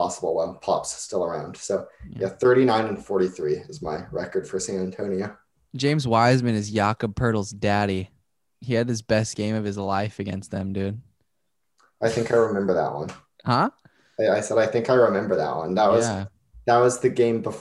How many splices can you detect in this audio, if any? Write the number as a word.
zero